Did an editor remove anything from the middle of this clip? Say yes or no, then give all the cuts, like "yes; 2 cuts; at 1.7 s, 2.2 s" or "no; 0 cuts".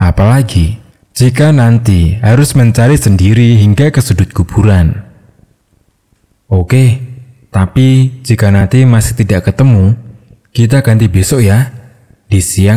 no; 0 cuts